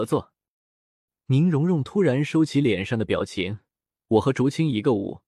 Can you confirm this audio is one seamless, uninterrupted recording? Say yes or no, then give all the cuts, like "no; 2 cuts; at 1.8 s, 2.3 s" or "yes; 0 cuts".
no; 1 cut; at 4.0 s